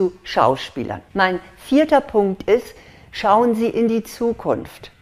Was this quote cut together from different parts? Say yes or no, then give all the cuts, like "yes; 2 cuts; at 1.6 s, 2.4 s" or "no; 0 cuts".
yes; 1 cut; at 1.1 s